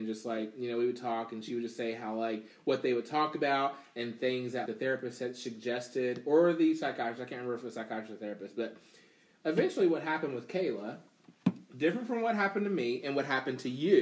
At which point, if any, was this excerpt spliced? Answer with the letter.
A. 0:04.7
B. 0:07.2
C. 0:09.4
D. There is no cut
A